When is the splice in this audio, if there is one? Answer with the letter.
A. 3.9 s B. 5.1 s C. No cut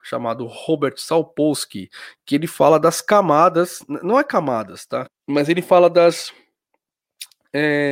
B